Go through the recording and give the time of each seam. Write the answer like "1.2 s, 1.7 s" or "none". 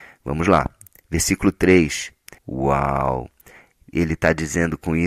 2.4 s